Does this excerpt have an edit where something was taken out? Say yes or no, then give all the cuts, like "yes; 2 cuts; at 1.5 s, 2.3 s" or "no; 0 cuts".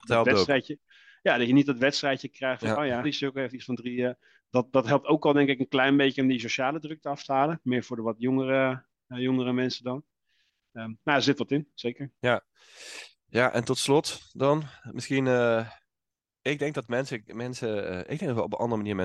yes; 2 cuts; at 3.0 s, 12.2 s